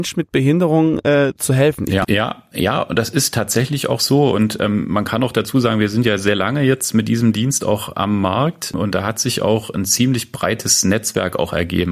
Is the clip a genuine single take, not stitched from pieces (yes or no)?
no